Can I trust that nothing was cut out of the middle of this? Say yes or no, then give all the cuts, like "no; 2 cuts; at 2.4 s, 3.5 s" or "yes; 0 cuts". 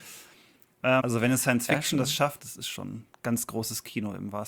no; 2 cuts; at 1.0 s, 2.4 s